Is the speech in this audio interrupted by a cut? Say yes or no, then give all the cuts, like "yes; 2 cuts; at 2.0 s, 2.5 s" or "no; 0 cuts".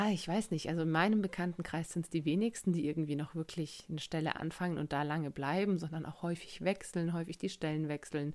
no; 0 cuts